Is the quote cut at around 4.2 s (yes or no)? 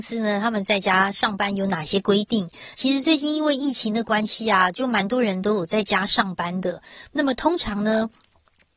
no